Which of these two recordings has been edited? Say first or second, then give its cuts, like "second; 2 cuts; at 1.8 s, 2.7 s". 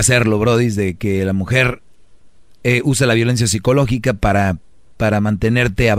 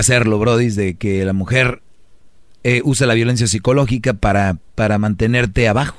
second; 1 cut; at 4.7 s